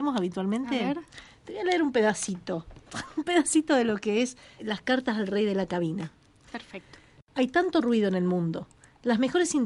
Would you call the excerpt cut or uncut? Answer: cut